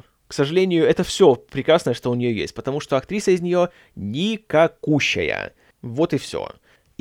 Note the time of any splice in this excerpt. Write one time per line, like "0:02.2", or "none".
0:05.7